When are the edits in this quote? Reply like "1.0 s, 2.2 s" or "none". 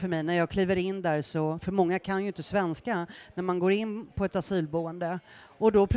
none